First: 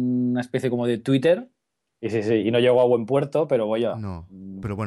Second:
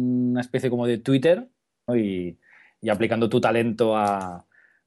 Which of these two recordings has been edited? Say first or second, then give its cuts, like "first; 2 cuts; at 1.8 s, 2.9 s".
second; 1 cut; at 1.9 s